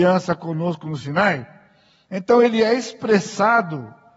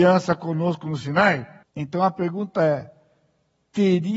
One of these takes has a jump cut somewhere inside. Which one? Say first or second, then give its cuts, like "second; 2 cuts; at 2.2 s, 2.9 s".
second; 1 cut; at 1.6 s